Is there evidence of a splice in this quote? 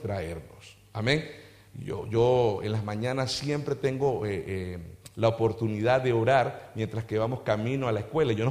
no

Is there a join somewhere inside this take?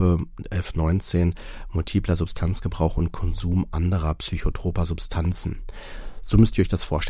no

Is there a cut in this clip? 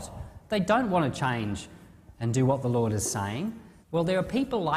yes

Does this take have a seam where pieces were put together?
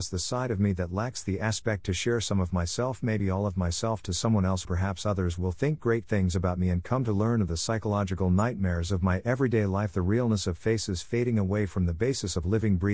yes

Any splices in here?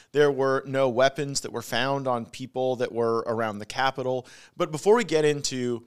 no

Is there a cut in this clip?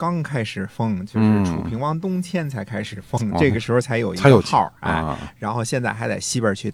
no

